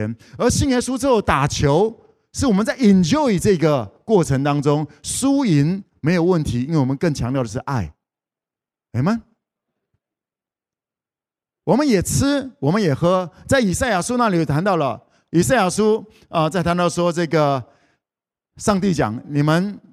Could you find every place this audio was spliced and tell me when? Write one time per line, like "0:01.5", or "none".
none